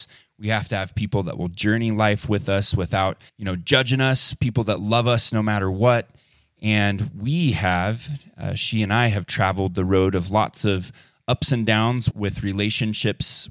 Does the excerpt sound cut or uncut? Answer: cut